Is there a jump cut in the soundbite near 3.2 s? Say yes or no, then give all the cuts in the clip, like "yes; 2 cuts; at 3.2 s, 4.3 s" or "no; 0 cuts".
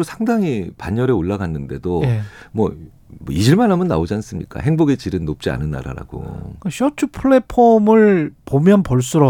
yes; 1 cut; at 3.2 s